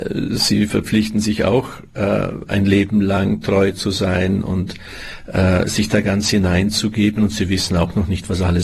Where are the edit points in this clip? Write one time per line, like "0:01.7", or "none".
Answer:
none